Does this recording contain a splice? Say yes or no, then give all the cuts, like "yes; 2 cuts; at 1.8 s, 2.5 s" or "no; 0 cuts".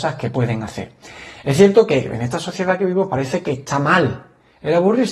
no; 0 cuts